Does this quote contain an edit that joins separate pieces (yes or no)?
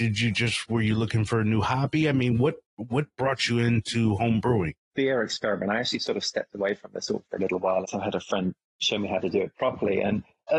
yes